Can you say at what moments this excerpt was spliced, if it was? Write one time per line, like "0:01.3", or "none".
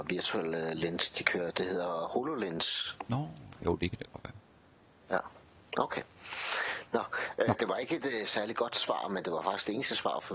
none